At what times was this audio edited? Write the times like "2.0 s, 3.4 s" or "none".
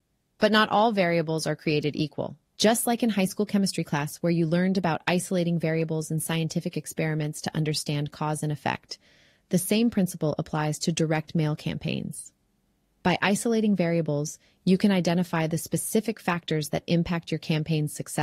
2.5 s